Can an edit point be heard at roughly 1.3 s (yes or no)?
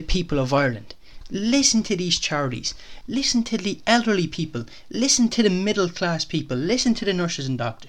no